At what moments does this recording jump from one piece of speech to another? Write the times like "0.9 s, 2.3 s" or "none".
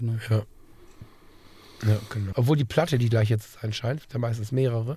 2.3 s, 4.0 s